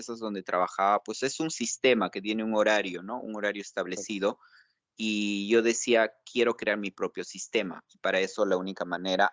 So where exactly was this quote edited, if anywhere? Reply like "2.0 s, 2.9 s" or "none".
none